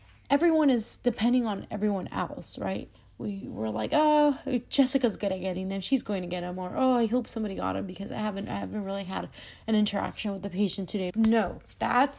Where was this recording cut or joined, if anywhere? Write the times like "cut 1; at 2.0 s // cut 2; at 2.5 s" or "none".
cut 1; at 11.1 s